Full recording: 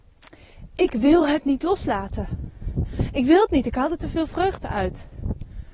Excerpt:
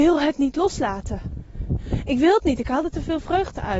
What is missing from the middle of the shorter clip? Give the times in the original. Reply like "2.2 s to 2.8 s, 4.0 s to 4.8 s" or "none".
none